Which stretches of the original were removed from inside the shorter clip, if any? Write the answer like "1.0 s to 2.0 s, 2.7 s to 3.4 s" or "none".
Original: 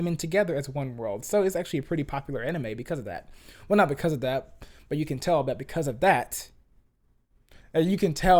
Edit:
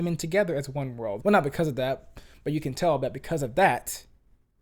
1.2 s to 3.7 s